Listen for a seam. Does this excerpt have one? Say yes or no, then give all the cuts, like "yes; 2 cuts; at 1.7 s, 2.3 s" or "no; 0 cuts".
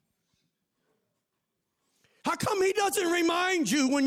no; 0 cuts